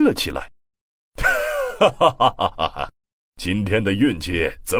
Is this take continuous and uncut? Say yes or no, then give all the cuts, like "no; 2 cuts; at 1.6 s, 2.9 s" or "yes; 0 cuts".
yes; 0 cuts